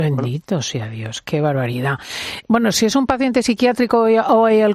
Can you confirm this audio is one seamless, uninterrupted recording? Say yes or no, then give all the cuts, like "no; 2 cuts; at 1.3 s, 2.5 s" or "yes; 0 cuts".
no; 2 cuts; at 1.2 s, 2.4 s